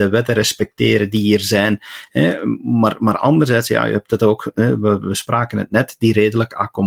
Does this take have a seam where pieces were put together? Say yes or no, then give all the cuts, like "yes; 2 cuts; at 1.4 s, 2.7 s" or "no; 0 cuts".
no; 0 cuts